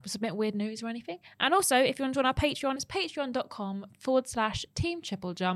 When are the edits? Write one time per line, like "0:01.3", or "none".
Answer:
none